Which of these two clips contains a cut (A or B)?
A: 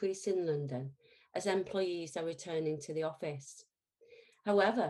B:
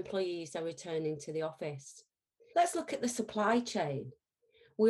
B